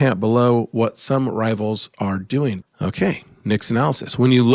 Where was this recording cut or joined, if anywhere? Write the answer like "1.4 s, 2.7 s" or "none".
2.6 s